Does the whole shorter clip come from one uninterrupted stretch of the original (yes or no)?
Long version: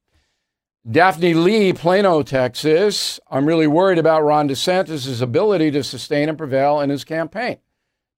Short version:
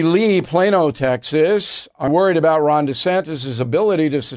no